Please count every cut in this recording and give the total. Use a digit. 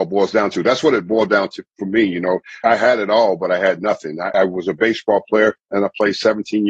2